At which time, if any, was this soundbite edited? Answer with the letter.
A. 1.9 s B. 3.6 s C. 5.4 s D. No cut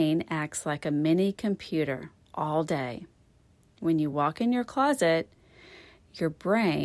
D